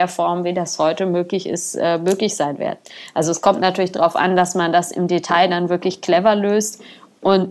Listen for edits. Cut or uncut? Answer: uncut